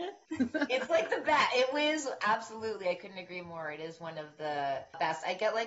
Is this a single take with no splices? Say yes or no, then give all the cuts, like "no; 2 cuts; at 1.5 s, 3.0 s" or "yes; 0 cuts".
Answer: yes; 0 cuts